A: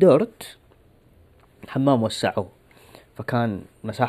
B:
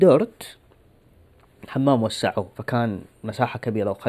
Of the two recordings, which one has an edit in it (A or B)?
B